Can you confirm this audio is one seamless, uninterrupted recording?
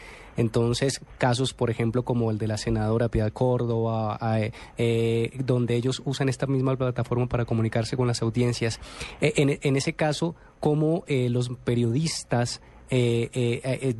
no; 1 cut; at 4.7 s

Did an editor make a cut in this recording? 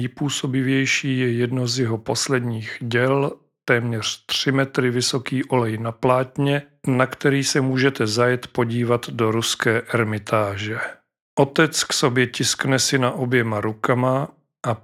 yes; 1 cut; at 11.3 s

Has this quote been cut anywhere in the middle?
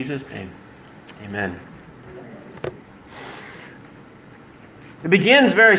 no; 0 cuts

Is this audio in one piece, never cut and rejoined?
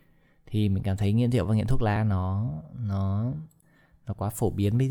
yes; 0 cuts

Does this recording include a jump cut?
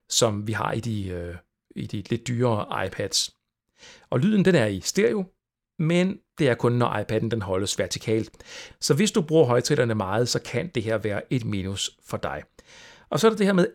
yes; 1 cut; at 8.7 s

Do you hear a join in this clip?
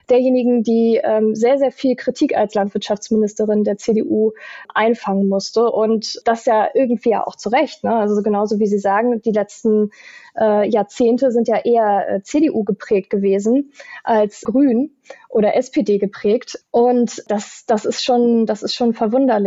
no; 0 cuts

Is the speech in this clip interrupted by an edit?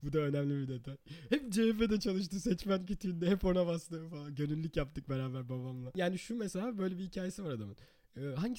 no; 0 cuts

